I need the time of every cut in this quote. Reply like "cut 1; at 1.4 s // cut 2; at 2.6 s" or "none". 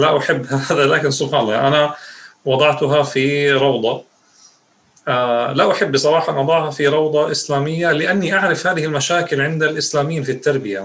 none